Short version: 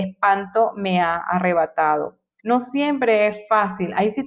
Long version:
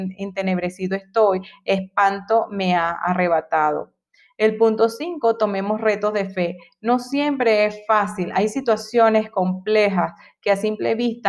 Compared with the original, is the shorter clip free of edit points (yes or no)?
no